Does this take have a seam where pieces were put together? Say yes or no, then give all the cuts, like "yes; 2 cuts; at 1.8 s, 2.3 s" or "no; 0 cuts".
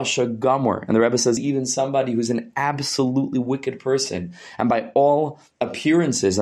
no; 0 cuts